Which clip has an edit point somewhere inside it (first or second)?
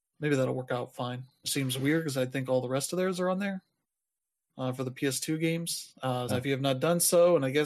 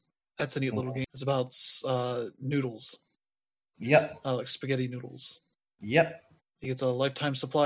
first